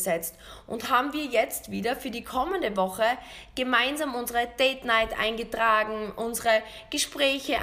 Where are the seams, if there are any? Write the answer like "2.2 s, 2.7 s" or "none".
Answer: none